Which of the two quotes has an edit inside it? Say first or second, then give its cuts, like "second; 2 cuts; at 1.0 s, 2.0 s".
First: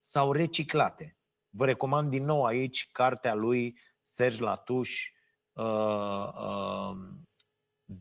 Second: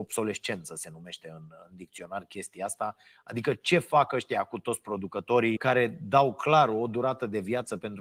second; 1 cut; at 5.6 s